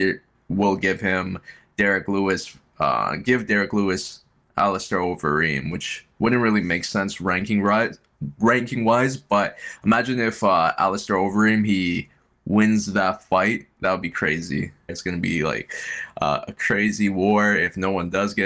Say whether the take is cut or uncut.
cut